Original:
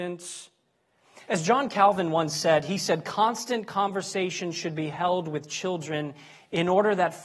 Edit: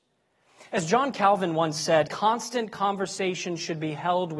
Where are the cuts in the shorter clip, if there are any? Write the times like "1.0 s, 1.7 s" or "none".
2.1 s